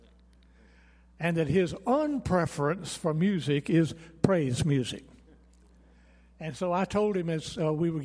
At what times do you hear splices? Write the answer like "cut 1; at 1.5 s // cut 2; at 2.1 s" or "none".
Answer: none